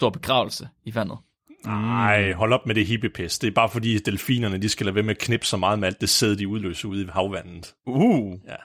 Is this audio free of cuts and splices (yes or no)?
yes